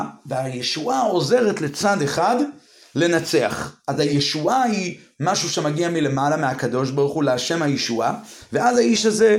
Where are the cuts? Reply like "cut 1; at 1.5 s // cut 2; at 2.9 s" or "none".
none